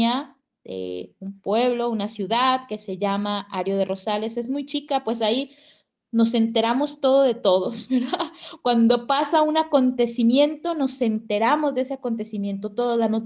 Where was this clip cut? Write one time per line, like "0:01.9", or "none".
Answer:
none